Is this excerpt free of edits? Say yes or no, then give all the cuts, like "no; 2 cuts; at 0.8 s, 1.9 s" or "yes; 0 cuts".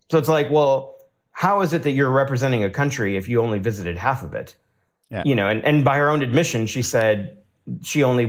yes; 0 cuts